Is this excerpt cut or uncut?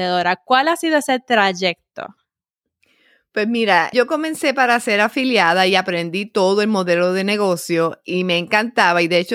cut